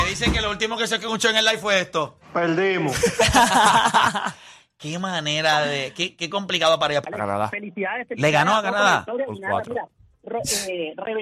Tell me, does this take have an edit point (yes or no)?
yes